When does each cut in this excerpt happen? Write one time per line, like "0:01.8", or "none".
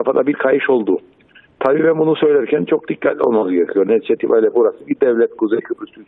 none